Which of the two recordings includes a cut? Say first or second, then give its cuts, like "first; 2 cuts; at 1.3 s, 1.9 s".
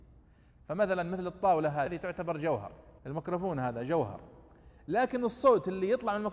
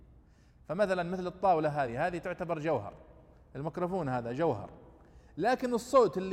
first; 2 cuts; at 1.9 s, 3.0 s